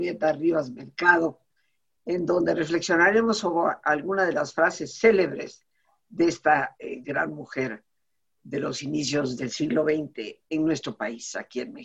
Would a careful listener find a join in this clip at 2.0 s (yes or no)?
yes